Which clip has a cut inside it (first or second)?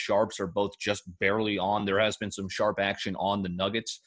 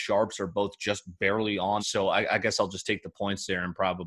second